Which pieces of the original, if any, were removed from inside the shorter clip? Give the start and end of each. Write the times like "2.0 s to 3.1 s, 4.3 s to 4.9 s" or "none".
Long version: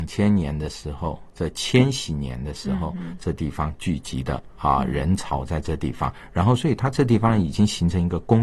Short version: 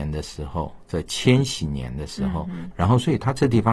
3.2 s to 6.3 s